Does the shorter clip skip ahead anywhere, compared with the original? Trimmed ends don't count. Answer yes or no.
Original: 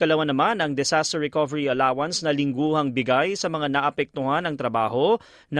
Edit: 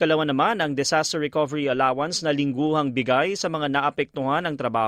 no